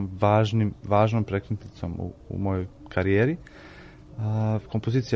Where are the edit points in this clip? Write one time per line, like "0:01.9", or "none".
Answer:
none

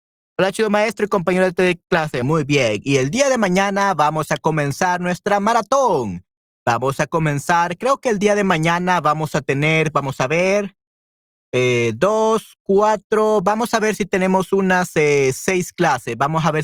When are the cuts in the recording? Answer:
0:02.2

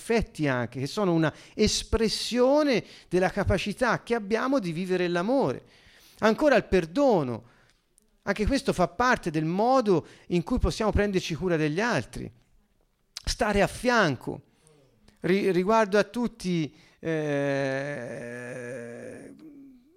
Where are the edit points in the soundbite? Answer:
none

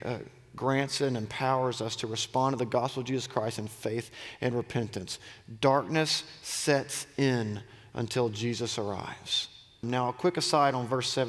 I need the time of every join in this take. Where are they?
0:09.8

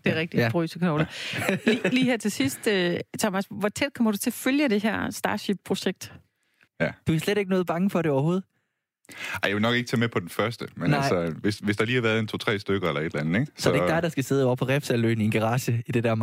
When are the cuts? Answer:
0:06.7

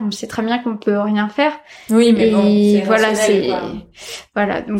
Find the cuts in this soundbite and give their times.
none

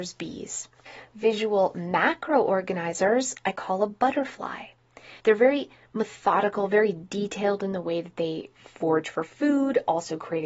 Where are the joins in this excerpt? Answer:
0:05.2

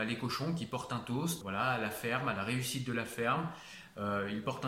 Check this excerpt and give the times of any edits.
0:01.4

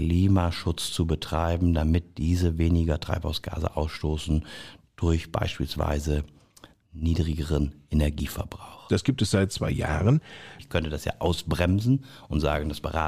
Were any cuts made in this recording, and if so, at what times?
0:08.9
0:10.6

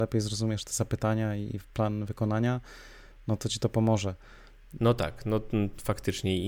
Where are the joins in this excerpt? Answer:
0:04.8

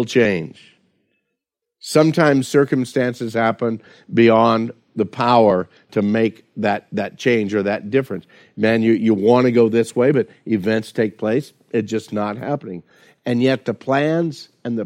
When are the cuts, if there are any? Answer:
none

